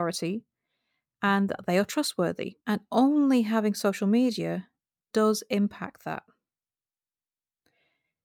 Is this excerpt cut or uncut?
cut